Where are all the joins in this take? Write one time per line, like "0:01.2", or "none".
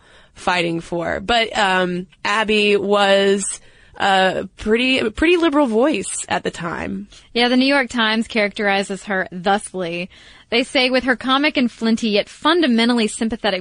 0:02.1

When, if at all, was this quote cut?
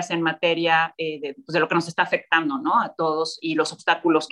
none

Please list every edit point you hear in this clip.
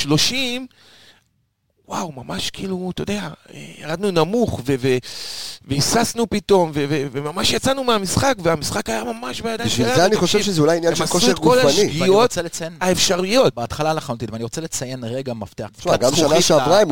0:15.7

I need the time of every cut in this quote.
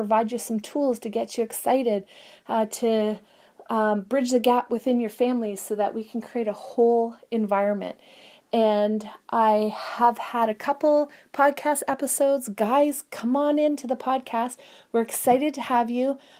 none

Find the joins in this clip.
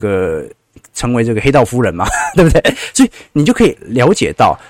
none

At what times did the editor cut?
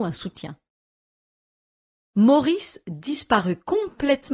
0:02.0

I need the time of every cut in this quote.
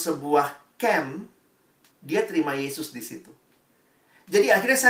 0:01.9

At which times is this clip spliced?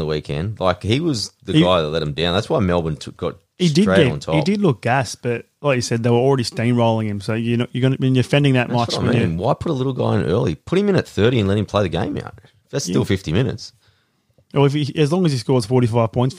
none

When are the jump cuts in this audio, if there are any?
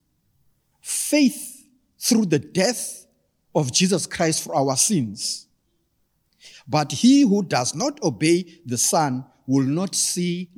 0:06.5

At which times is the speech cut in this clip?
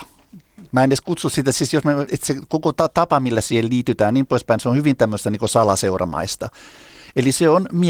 0:02.1

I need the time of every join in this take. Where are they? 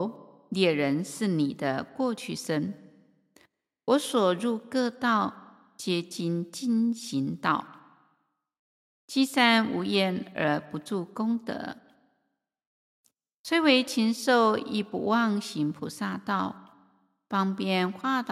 none

